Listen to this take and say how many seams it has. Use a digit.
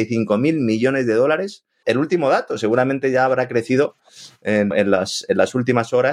2